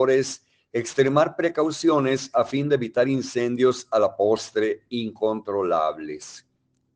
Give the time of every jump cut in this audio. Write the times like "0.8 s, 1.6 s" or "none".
none